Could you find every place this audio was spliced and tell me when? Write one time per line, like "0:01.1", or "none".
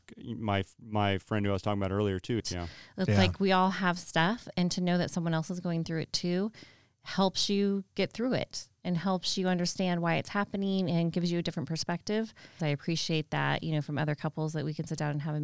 0:02.4
0:12.6